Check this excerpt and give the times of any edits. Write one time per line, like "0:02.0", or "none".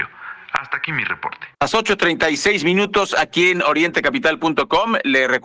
0:01.5